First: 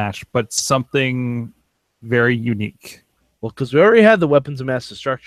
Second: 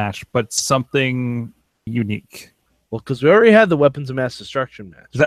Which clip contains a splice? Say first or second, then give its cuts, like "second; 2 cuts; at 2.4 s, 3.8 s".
second; 1 cut; at 1.9 s